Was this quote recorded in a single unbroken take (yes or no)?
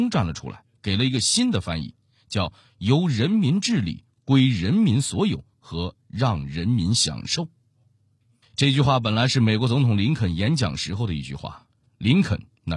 yes